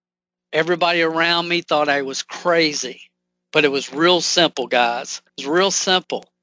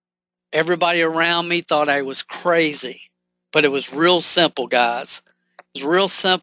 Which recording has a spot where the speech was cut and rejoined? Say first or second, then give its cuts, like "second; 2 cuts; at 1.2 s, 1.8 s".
first; 1 cut; at 5.3 s